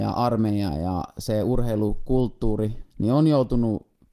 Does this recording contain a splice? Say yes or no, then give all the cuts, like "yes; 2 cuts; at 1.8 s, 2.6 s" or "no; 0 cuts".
yes; 1 cut; at 2.8 s